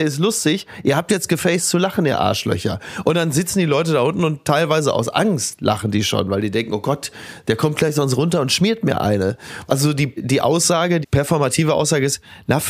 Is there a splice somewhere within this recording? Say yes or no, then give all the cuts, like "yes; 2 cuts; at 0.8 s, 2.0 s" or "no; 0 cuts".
yes; 2 cuts; at 9.7 s, 11.0 s